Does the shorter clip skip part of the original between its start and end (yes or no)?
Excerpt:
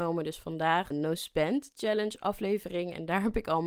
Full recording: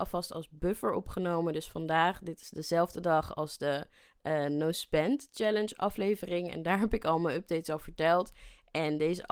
yes